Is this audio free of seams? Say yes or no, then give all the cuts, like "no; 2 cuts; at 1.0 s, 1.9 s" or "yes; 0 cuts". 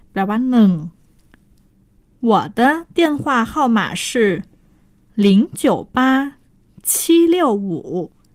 yes; 0 cuts